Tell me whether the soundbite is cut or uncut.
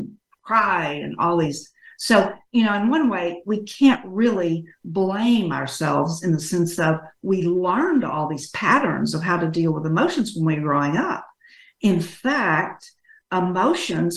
uncut